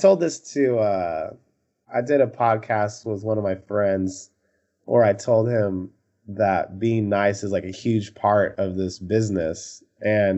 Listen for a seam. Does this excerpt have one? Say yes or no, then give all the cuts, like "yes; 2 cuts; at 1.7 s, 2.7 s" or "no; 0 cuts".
no; 0 cuts